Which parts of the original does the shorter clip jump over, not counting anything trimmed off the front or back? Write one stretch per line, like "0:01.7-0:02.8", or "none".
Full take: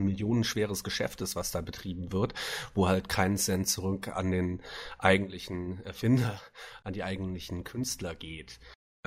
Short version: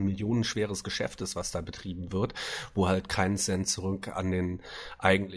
none